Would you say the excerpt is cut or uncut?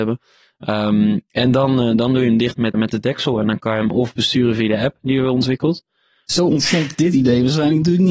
cut